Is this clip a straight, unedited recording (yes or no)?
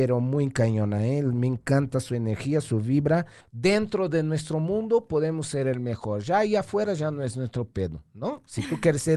no